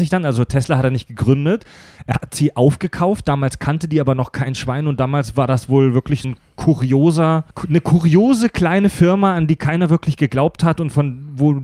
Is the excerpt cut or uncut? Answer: cut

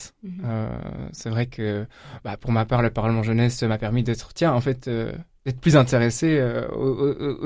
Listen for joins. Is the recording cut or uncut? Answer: uncut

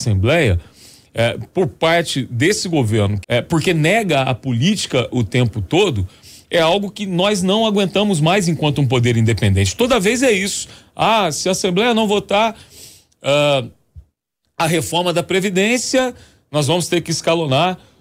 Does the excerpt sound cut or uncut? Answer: cut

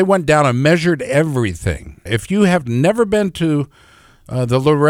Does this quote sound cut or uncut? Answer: cut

